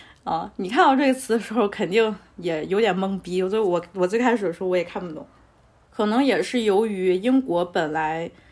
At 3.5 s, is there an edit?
no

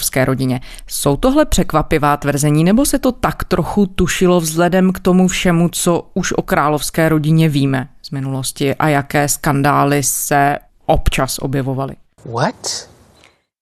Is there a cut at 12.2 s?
yes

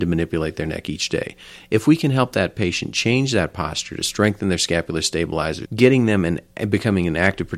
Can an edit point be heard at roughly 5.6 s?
yes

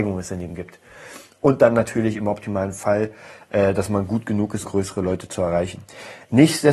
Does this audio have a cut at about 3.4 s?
no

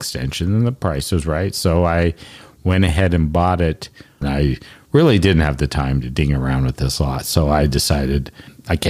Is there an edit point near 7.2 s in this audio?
no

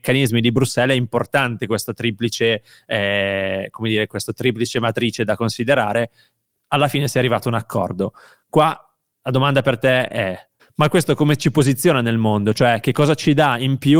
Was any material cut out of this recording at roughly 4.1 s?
no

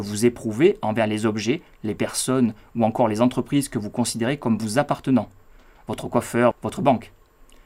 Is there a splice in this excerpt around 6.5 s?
yes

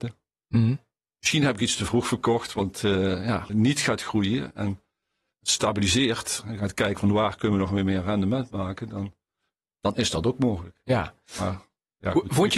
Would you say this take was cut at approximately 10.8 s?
no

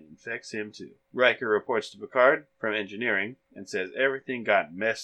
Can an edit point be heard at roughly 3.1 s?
no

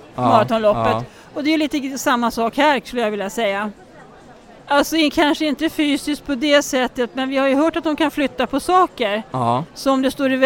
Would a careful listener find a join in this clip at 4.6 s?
yes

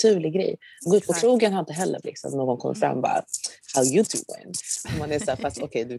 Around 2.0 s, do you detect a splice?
yes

